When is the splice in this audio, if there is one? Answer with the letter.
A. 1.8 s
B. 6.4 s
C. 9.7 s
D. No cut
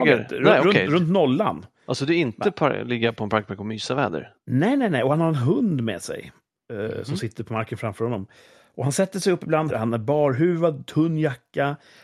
C